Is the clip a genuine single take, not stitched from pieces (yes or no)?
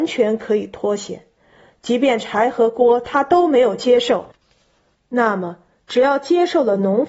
yes